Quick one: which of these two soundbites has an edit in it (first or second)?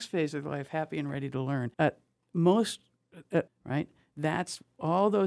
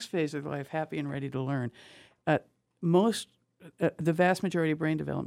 first